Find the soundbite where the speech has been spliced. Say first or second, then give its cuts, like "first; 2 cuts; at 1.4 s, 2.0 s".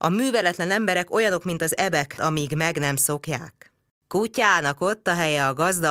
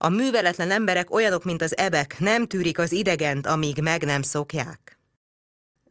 first; 2 cuts; at 2.2 s, 4.0 s